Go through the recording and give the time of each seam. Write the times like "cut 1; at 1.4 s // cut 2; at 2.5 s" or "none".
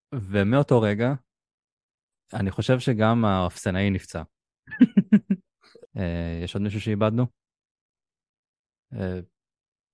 cut 1; at 5.9 s